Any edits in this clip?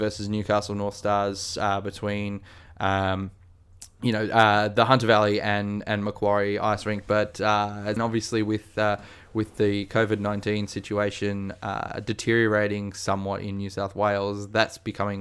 yes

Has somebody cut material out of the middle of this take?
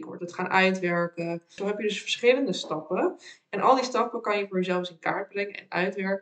yes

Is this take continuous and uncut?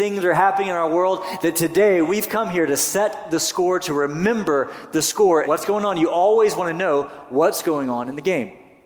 no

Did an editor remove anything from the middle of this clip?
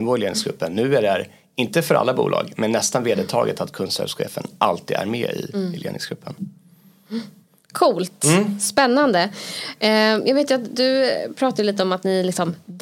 no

